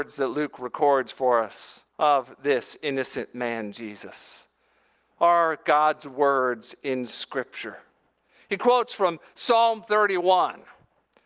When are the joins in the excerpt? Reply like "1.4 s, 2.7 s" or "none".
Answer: 1.9 s